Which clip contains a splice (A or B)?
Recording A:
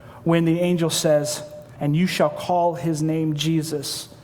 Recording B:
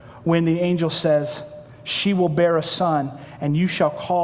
A